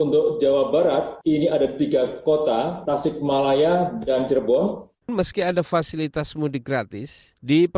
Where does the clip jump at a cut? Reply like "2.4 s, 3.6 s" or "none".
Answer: 2.8 s, 4.9 s